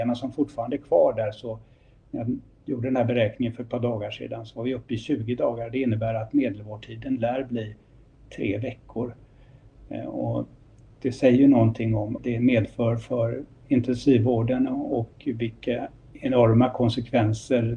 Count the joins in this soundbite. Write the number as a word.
one